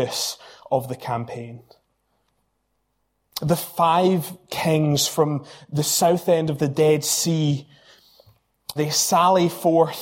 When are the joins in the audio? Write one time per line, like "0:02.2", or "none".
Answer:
0:08.8